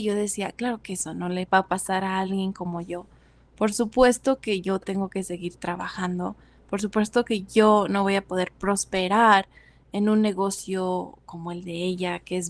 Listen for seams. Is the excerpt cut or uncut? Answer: uncut